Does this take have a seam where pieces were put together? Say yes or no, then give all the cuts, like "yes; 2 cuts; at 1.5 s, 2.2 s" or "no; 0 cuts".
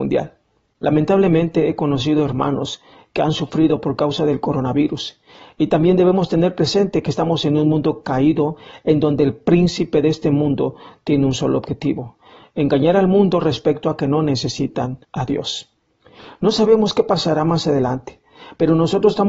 yes; 1 cut; at 15.0 s